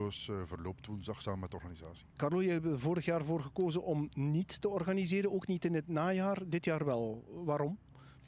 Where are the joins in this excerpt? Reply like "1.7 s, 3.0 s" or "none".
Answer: 2.1 s